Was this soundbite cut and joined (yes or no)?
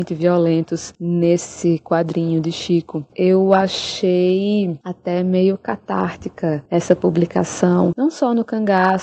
yes